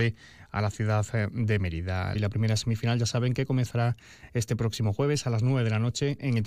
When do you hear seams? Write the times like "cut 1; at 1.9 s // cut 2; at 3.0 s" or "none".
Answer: cut 1; at 2.1 s